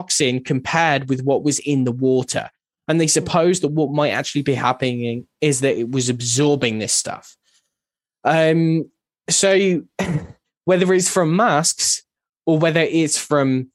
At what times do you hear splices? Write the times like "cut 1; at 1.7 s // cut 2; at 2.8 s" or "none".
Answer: none